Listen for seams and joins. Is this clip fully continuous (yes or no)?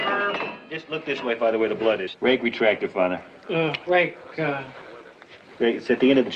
yes